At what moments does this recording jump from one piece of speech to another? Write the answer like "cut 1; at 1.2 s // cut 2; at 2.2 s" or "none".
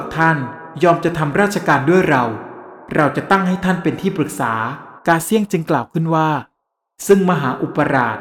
cut 1; at 5.0 s